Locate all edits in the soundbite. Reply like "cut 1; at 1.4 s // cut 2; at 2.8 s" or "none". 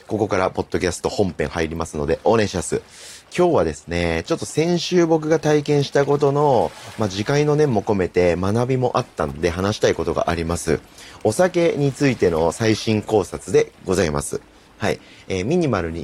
none